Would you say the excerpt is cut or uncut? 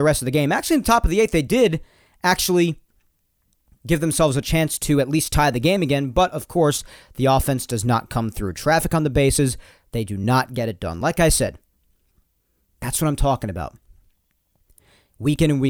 uncut